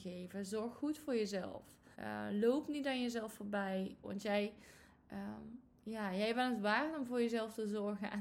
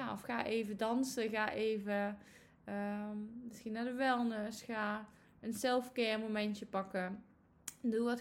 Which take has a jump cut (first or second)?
first